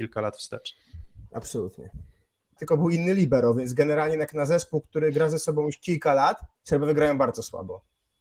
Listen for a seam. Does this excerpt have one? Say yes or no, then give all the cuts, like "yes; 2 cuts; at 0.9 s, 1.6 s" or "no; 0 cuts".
yes; 2 cuts; at 2.6 s, 6.5 s